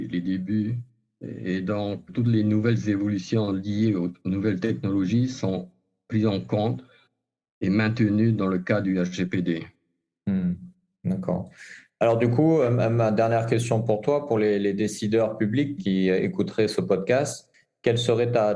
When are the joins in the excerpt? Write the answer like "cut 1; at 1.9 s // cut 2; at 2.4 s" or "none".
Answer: cut 1; at 2.1 s // cut 2; at 15.8 s